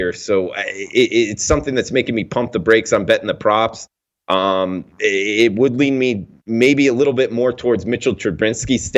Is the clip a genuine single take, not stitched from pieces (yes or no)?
yes